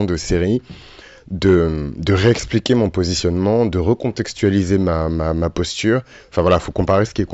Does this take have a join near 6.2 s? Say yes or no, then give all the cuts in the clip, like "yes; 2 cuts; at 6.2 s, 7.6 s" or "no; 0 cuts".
yes; 1 cut; at 6.2 s